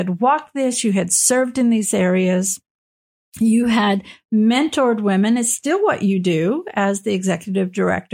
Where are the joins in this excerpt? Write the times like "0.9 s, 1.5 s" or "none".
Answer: none